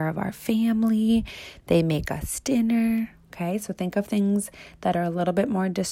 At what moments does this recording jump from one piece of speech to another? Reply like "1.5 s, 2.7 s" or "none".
none